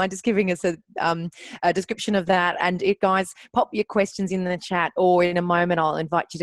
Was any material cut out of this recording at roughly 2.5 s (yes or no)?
no